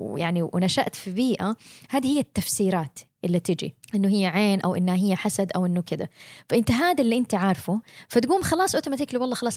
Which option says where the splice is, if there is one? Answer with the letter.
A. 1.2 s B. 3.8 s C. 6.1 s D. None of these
B